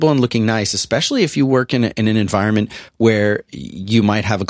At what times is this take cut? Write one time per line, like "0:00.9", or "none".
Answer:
none